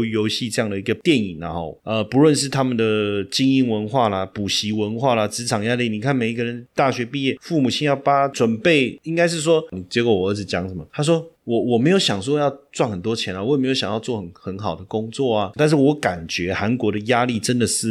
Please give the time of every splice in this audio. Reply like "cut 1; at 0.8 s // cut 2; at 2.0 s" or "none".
cut 1; at 9.7 s // cut 2; at 15.6 s